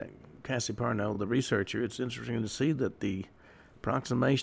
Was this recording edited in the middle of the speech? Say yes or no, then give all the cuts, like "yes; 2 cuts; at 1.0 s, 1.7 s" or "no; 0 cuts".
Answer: no; 0 cuts